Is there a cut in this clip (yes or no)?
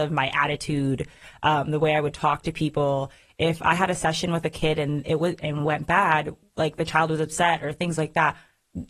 no